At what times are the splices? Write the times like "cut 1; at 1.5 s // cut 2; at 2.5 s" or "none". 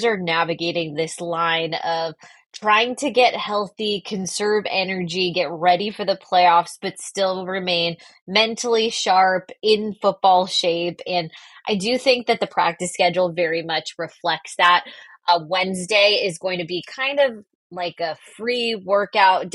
none